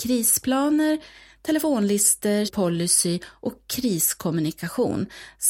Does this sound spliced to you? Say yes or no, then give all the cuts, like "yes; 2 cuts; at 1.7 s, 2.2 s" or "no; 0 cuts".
yes; 1 cut; at 2.5 s